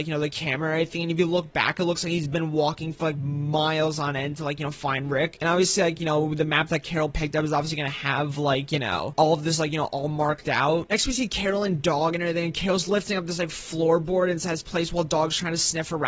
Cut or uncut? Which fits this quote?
uncut